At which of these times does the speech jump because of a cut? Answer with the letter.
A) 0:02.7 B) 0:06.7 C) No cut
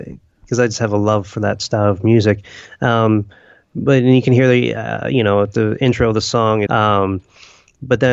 B